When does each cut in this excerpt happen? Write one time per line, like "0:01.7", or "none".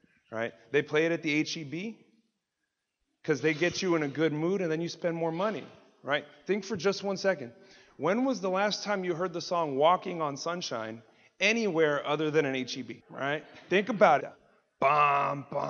0:13.0
0:14.2